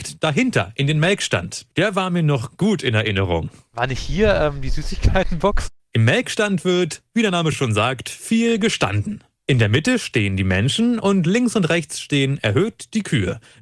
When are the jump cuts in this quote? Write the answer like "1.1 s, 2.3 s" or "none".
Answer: none